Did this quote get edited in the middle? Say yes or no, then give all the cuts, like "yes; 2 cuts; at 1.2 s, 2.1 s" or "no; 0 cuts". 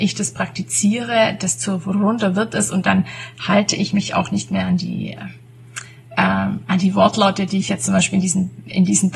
no; 0 cuts